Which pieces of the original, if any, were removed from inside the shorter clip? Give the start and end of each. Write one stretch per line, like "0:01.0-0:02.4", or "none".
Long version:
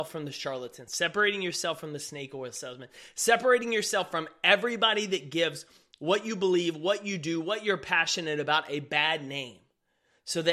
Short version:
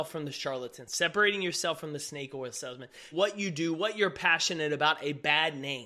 0:03.1-0:06.8